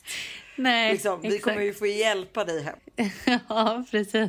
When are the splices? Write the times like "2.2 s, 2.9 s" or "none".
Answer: none